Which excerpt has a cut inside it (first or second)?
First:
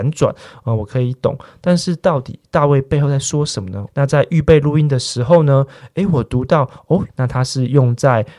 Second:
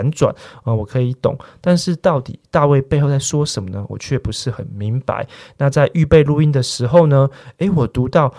first